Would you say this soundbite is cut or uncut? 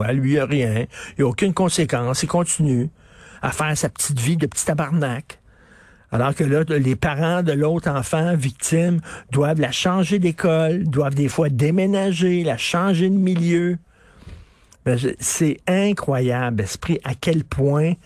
uncut